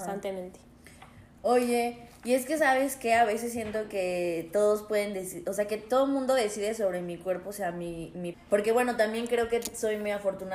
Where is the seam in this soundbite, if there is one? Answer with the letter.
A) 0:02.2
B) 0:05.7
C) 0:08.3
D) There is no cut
C